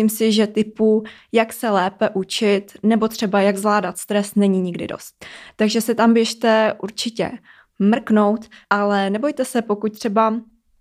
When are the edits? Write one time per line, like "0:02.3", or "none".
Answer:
0:08.6